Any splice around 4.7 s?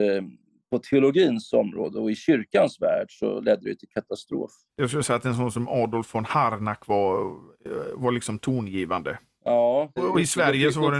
yes; 1 cut; at 4.7 s

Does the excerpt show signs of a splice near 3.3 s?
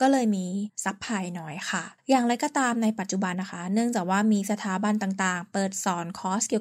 yes; 1 cut; at 3.3 s

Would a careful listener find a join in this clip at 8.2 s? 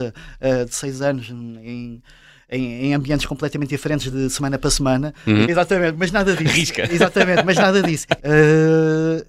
yes; 3 cuts; at 4.1 s, 5.4 s, 8.2 s

